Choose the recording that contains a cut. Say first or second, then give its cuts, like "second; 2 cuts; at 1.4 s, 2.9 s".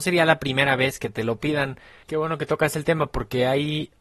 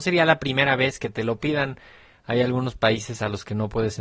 first; 1 cut; at 2.0 s